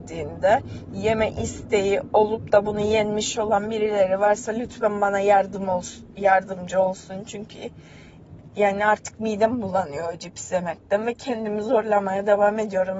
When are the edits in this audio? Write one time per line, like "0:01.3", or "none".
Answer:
none